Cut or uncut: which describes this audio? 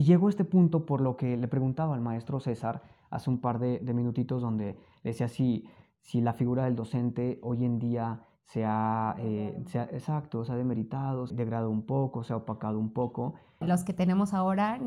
cut